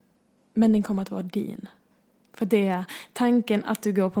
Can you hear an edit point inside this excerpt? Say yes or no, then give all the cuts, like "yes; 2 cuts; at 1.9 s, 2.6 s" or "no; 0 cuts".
yes; 1 cut; at 2.2 s